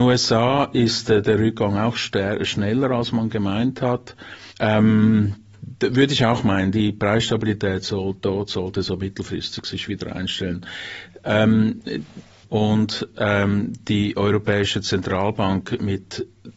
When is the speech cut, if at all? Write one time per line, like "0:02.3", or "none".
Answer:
0:04.5
0:12.4